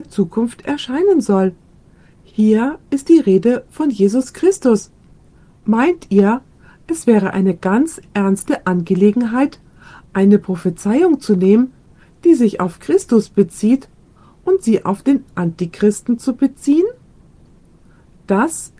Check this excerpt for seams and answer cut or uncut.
uncut